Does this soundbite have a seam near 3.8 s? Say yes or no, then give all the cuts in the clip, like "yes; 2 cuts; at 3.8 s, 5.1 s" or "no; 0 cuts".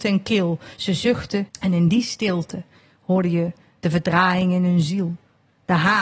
no; 1 cut; at 1.5 s